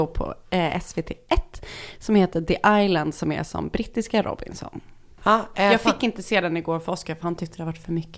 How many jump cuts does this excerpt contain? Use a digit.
1